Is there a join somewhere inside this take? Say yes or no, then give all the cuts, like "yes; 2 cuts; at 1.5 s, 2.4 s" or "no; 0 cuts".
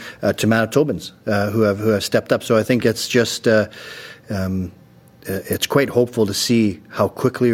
no; 0 cuts